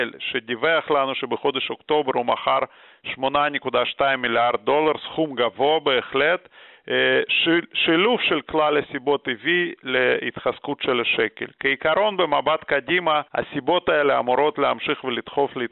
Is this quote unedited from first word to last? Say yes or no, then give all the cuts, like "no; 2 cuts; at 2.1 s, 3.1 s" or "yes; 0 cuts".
no; 1 cut; at 13.3 s